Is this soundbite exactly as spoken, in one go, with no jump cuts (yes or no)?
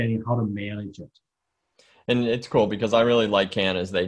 yes